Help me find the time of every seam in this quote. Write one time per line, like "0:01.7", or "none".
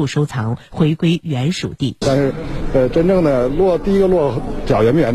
0:02.0